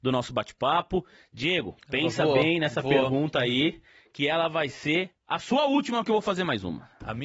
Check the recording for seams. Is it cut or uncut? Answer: uncut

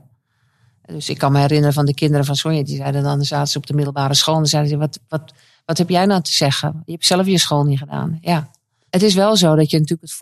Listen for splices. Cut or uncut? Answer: uncut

